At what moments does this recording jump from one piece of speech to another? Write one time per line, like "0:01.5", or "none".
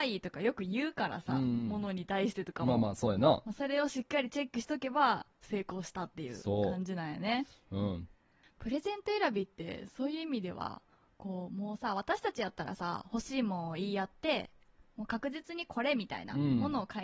none